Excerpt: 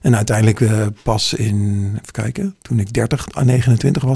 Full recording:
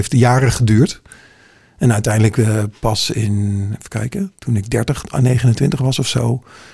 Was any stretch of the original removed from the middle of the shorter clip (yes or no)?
no